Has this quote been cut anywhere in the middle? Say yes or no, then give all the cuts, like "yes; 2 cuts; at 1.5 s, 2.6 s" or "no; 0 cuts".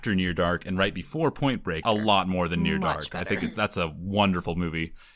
yes; 1 cut; at 1.8 s